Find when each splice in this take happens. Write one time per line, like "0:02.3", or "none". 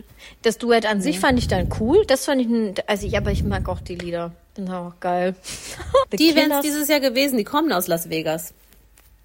0:06.0